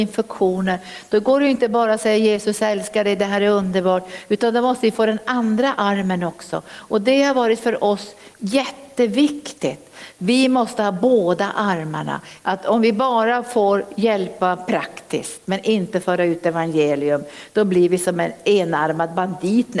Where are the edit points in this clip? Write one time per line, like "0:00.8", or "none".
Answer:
0:10.2
0:12.4